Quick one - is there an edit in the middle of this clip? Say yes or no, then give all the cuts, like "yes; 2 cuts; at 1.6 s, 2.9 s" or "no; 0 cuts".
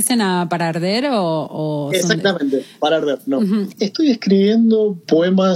yes; 1 cut; at 3.7 s